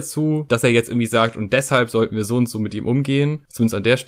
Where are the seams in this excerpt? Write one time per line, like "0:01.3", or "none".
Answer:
none